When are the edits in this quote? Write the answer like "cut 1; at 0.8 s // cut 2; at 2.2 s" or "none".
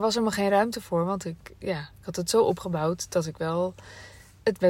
none